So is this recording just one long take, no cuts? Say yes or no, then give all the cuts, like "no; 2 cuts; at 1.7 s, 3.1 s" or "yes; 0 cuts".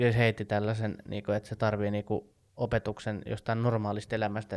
yes; 0 cuts